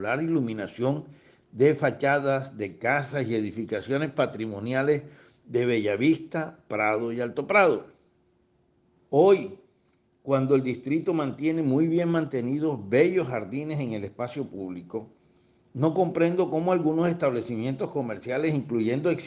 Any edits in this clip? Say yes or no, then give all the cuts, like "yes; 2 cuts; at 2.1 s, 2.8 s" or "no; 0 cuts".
yes; 1 cut; at 9.0 s